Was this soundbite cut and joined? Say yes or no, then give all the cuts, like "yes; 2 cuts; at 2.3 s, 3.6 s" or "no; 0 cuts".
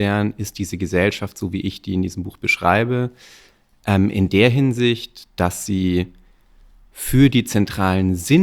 no; 0 cuts